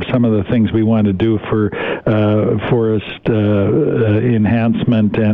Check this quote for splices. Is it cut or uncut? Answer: uncut